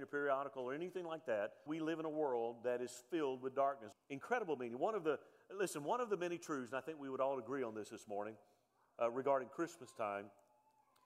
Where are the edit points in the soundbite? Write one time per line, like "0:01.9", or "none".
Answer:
0:01.7
0:03.9